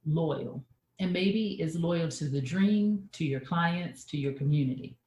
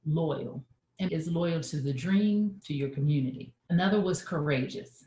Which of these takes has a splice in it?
second; 2 cuts; at 1.1 s, 2.6 s

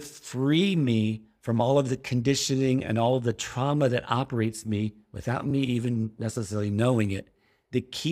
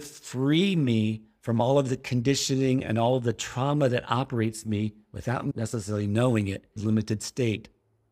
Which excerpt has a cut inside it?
second; 2 cuts; at 5.5 s, 6.8 s

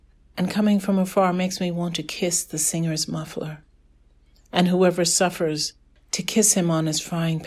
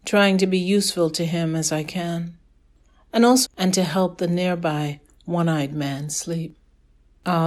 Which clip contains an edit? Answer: second; 1 cut; at 3.5 s

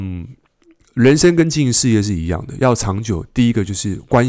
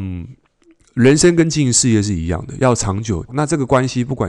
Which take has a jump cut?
second; 1 cut; at 3.3 s

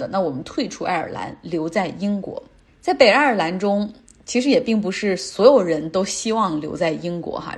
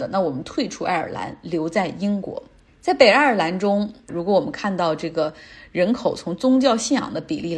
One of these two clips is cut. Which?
second; 1 cut; at 4.1 s

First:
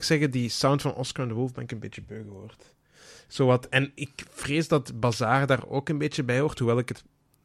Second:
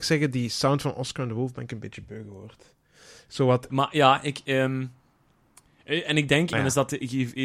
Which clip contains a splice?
second; 2 cuts; at 3.7 s, 6.5 s

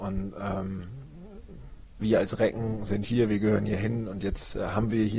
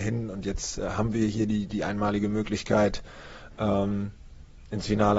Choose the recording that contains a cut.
first; 1 cut; at 2.0 s

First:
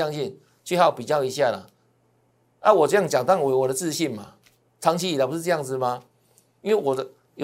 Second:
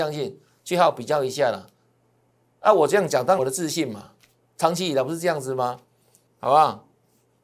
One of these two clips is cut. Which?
second; 2 cuts; at 3.4 s, 6.3 s

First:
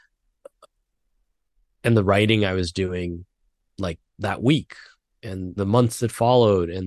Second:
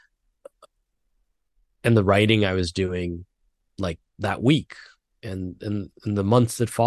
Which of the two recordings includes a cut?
first; 1 cut; at 5.6 s

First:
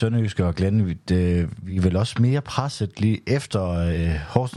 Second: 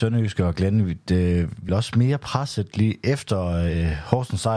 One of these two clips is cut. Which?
second; 1 cut; at 1.7 s

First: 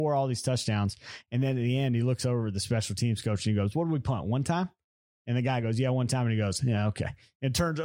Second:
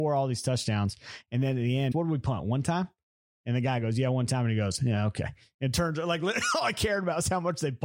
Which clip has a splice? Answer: second; 1 cut; at 1.9 s

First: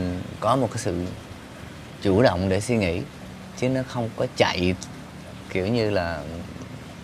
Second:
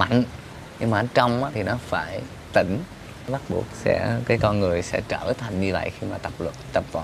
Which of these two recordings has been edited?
second; 1 cut; at 1.5 s

